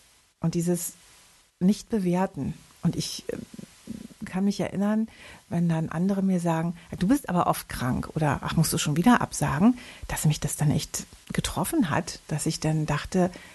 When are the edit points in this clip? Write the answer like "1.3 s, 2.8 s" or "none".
11.2 s